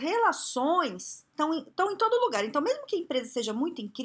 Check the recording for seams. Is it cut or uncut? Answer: uncut